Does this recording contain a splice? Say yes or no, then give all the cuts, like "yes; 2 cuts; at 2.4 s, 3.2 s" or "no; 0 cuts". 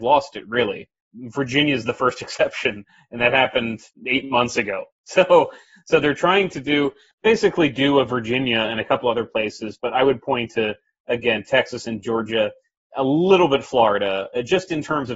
no; 0 cuts